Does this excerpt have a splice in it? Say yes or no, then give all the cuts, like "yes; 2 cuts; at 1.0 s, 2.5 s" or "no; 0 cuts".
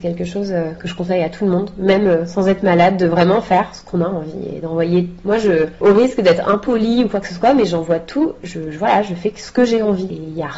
no; 0 cuts